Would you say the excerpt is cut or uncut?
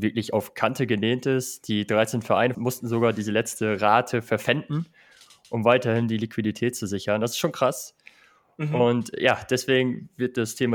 cut